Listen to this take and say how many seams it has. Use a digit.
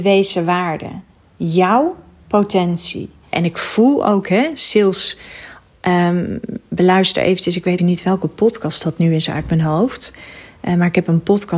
3